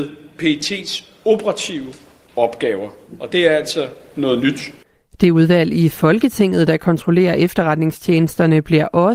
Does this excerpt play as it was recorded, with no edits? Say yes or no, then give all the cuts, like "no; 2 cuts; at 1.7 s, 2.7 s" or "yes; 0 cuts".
yes; 0 cuts